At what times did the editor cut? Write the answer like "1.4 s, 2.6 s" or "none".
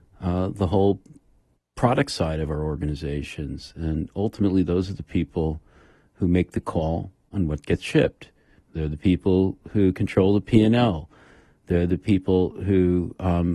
none